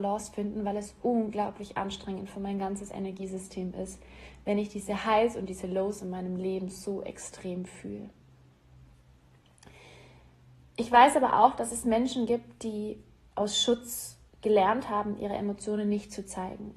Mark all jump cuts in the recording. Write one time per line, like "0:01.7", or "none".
none